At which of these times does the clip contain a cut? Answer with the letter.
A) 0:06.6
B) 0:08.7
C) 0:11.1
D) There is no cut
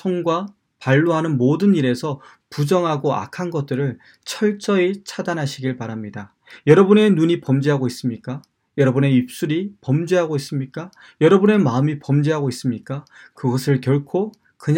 D